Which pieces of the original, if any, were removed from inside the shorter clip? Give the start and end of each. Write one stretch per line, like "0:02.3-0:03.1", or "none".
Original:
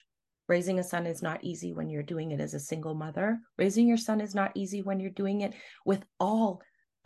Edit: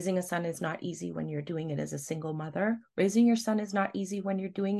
none